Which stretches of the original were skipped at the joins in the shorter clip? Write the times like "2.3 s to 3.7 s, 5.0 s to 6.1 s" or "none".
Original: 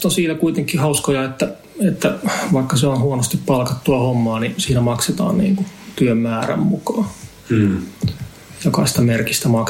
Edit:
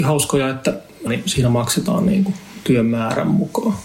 1.8 s to 4.4 s